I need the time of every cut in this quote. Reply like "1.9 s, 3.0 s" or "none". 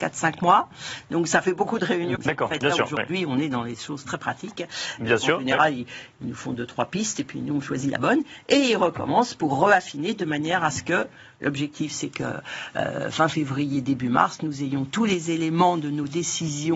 2.1 s, 5.0 s